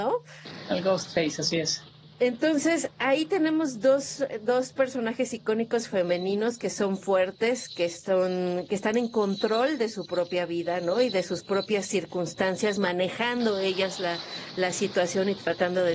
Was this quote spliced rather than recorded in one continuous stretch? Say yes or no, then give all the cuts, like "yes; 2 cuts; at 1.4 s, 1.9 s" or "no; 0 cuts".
no; 0 cuts